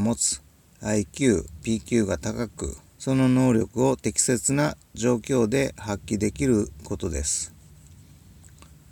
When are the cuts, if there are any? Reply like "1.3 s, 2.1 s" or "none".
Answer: 1.6 s, 2.9 s